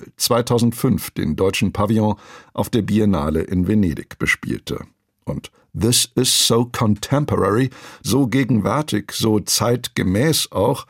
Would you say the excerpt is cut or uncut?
cut